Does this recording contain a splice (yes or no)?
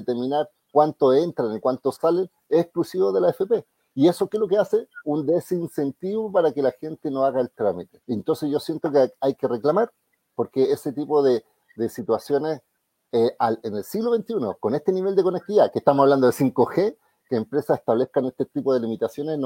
yes